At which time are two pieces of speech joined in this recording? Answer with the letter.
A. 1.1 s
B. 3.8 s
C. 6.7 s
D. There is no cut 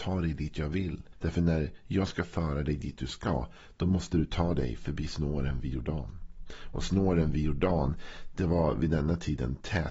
A